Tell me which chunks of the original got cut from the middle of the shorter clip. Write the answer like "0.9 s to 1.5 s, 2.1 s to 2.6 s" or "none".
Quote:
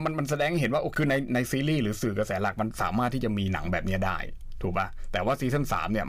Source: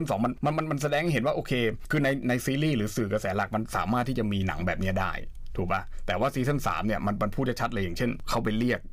1.5 s to 1.9 s